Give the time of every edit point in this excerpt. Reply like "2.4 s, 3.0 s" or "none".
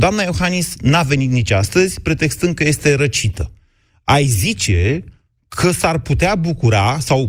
none